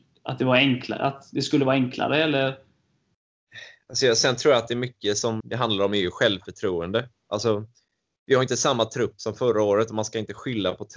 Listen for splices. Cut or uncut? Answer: cut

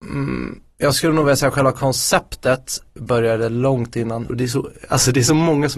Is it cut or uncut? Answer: cut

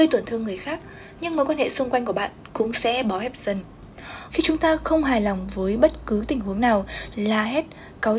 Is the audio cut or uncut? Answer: cut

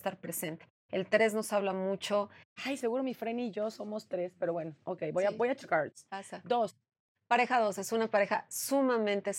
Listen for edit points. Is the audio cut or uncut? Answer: cut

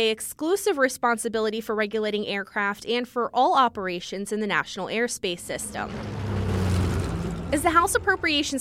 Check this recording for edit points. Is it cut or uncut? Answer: uncut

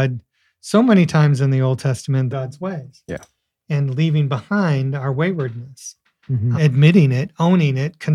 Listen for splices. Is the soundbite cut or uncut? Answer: cut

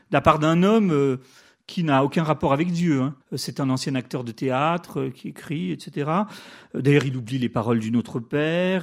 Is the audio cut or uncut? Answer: cut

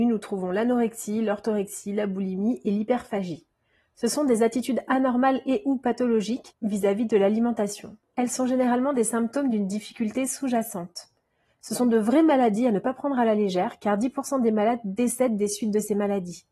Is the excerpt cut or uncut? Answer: uncut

